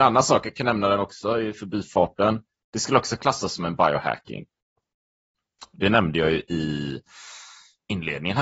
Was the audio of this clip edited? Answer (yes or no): no